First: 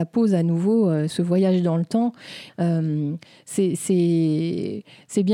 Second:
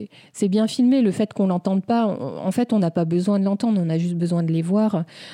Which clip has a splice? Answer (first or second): first